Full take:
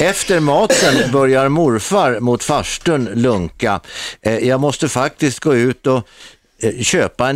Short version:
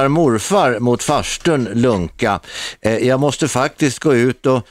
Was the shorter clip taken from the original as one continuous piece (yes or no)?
yes